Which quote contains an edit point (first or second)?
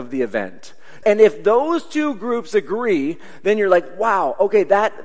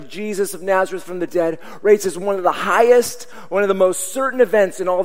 first